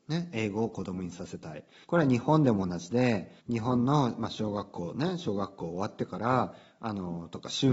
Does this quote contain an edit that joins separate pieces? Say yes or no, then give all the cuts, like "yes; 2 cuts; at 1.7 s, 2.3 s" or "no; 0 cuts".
yes; 2 cuts; at 1.8 s, 3.4 s